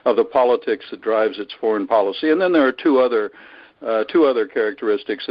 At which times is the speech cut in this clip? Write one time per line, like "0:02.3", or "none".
none